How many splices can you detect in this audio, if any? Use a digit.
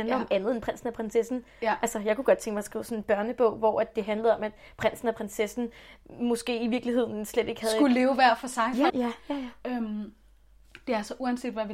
1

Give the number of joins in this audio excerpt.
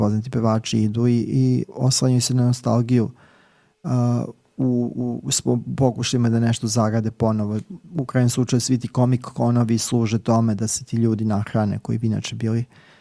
1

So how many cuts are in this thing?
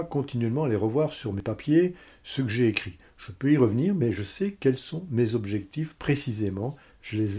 0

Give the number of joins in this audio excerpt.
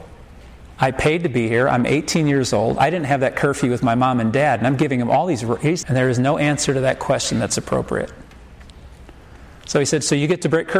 1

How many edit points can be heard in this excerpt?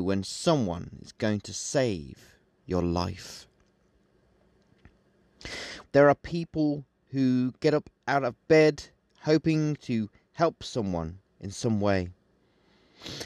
1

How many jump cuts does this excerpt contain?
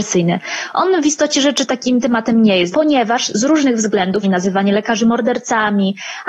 2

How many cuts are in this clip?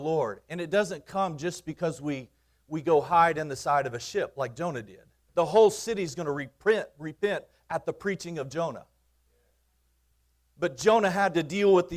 1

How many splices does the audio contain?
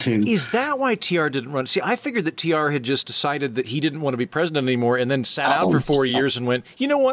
0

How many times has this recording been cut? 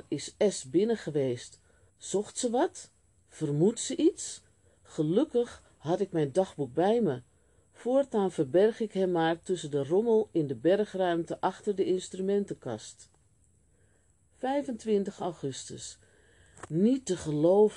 1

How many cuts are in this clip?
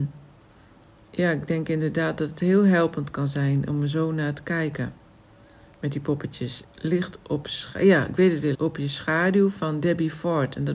2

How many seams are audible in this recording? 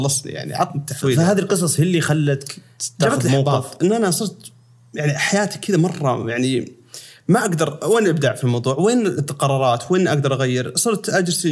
0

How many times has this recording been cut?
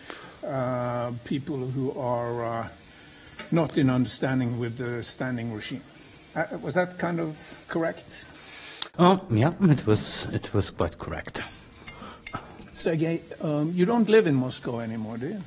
1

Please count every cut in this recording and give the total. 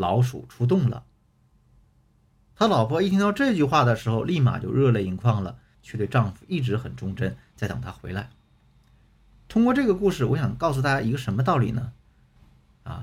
1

